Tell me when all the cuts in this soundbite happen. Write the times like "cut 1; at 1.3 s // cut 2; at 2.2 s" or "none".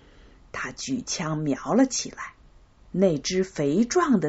cut 1; at 2.8 s